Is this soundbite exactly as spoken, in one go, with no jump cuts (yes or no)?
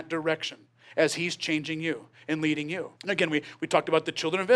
no